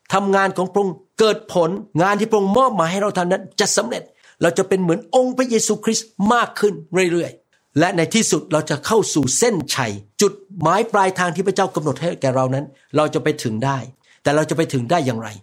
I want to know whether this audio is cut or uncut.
cut